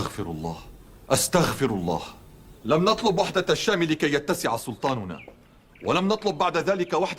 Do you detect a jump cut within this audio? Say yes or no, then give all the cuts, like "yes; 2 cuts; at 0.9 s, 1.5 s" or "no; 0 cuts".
no; 0 cuts